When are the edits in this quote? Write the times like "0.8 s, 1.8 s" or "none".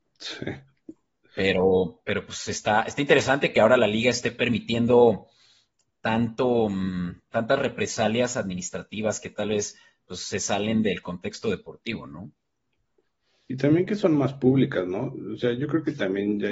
7.3 s